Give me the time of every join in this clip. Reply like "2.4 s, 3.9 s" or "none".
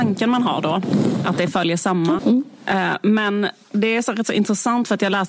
2.2 s

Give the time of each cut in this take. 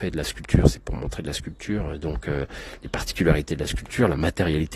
none

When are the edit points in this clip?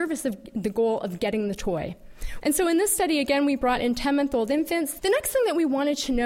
2.4 s, 5.0 s

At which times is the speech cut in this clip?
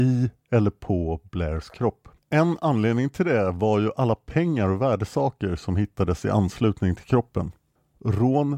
2.2 s

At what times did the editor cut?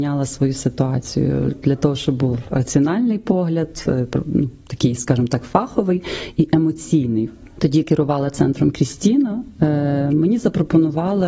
7.6 s

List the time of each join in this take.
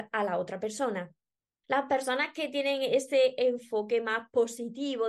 1.6 s

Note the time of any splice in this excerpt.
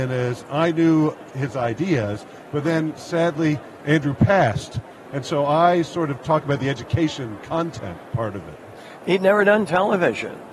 5.0 s, 9.0 s

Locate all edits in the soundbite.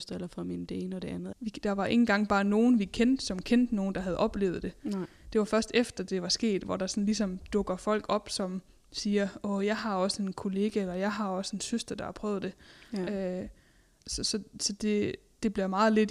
1.3 s

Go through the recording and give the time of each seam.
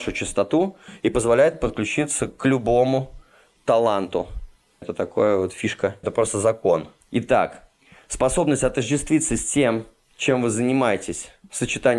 4.8 s, 6.0 s

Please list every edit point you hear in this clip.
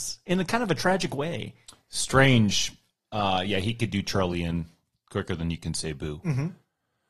none

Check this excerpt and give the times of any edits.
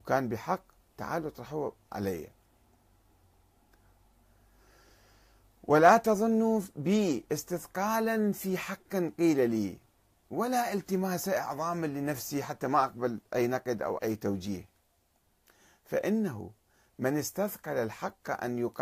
14.0 s

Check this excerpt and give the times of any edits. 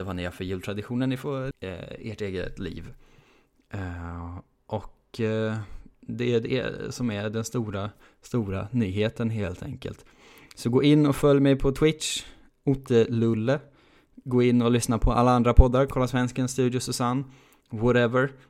1.5 s

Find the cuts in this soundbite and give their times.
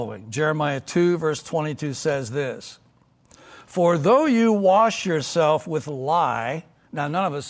none

